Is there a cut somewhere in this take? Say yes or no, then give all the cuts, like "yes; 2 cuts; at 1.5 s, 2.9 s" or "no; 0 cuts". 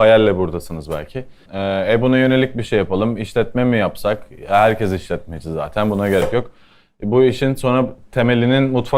yes; 1 cut; at 1.5 s